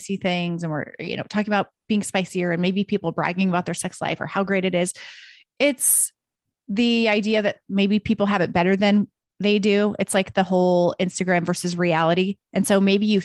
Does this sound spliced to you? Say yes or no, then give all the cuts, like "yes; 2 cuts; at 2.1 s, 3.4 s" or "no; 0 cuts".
no; 0 cuts